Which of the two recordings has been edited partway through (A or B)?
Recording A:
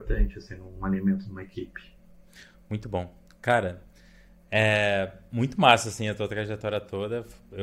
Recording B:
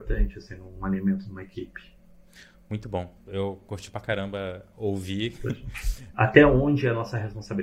B